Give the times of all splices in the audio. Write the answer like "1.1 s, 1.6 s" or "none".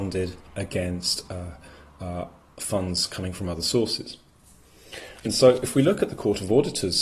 none